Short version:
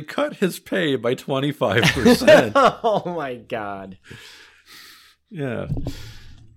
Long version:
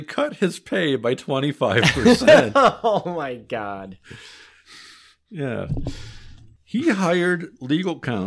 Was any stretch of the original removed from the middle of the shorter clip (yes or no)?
no